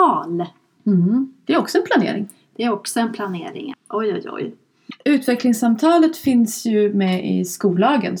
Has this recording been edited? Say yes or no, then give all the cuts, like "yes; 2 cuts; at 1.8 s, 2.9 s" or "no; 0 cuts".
yes; 2 cuts; at 3.7 s, 5.0 s